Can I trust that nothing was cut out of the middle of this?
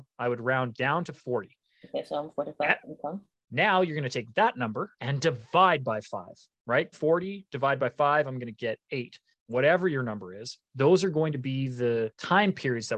no; 1 cut; at 6.9 s

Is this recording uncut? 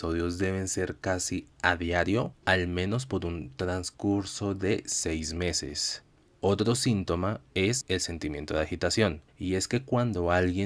yes; 0 cuts

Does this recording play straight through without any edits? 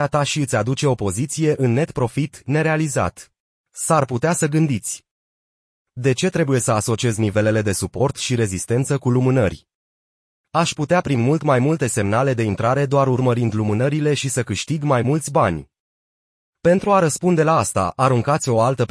no; 1 cut; at 3.6 s

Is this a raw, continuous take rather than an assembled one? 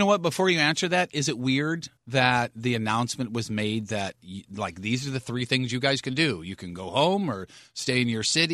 no; 1 cut; at 2.0 s

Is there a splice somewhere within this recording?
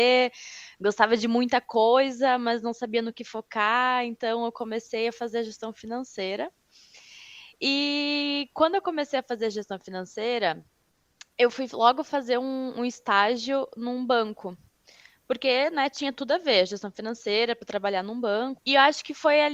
yes; 1 cut; at 18.6 s

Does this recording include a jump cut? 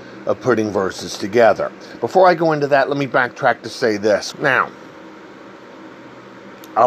yes; 1 cut; at 4.3 s

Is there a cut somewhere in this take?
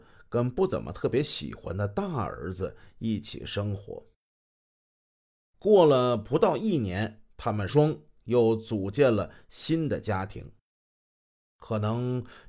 yes; 2 cuts; at 7.7 s, 11.4 s

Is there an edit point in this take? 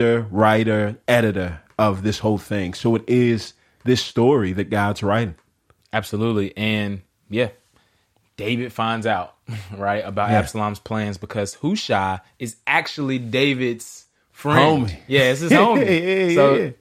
no; 0 cuts

